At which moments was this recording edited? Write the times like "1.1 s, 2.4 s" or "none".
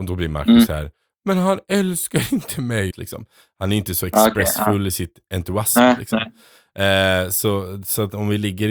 2.9 s